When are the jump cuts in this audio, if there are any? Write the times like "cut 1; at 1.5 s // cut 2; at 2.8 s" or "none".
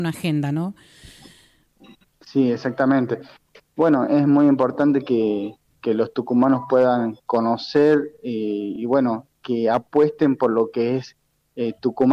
none